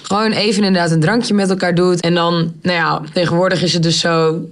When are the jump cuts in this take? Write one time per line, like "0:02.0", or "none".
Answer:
0:02.0